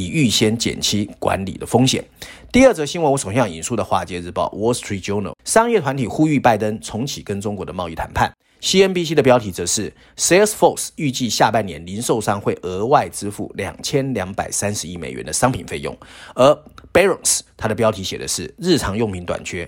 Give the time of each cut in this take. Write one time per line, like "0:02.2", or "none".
0:05.4